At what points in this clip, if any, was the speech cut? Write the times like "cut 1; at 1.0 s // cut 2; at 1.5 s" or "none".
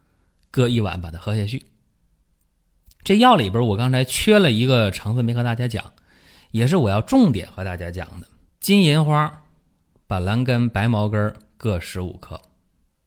cut 1; at 8.5 s